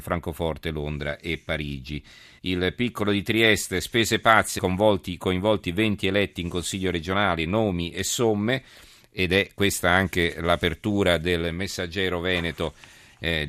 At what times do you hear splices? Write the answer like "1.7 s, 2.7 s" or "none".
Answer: 2.4 s, 4.6 s